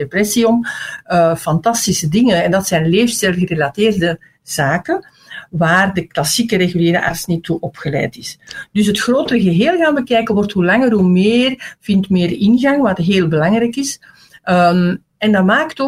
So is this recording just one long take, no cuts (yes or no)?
yes